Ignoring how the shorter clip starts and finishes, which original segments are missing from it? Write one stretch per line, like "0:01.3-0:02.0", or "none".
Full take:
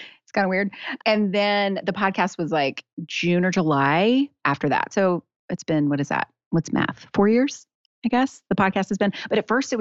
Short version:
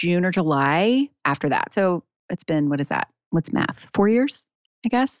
none